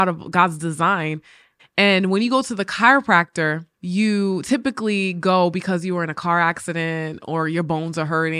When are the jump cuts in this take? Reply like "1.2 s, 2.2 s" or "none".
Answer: 1.6 s, 3.7 s